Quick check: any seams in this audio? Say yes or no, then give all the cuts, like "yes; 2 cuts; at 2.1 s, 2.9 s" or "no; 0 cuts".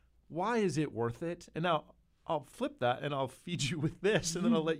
no; 0 cuts